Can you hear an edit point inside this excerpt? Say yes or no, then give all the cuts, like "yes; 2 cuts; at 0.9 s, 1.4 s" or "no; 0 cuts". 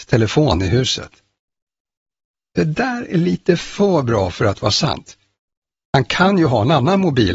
no; 0 cuts